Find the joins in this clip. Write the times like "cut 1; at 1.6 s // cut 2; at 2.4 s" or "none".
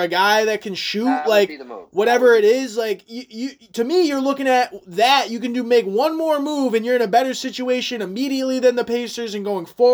none